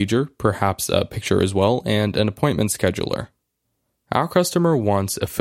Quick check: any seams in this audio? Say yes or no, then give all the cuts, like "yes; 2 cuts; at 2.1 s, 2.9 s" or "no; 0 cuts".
no; 0 cuts